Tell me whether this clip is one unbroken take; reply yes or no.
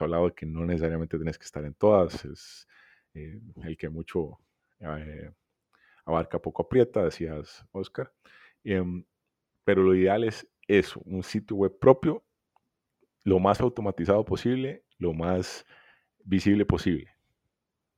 yes